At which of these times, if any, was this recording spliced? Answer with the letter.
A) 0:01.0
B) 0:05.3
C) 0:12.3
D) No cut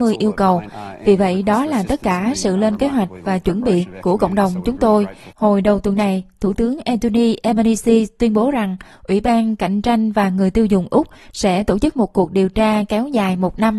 B